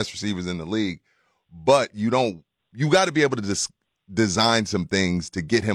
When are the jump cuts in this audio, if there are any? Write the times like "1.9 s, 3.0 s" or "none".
none